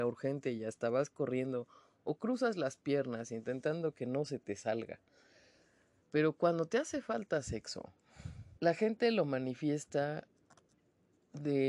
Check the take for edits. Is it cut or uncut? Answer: cut